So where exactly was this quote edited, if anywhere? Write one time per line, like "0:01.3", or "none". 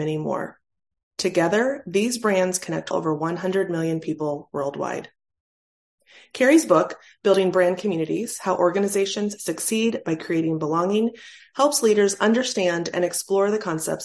0:02.9
0:11.4